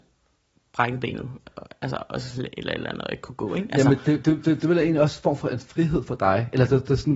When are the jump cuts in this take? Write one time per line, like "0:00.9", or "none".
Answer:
none